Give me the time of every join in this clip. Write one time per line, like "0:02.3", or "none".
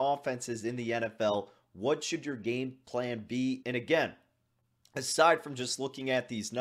0:03.6